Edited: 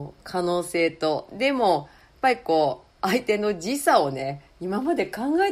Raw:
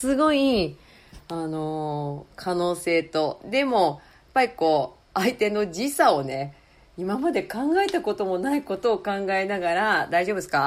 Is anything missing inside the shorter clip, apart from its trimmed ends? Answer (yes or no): yes